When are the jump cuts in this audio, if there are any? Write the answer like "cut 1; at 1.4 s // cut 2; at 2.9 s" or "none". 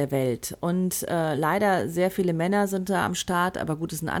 none